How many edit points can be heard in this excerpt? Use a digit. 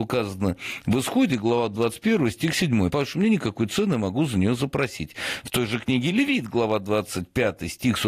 0